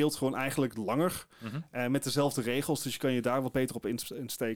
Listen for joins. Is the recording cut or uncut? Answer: uncut